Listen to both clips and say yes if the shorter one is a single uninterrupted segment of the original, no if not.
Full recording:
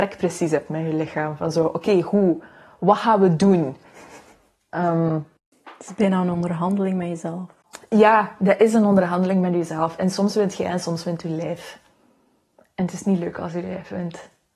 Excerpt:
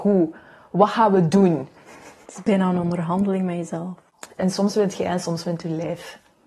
no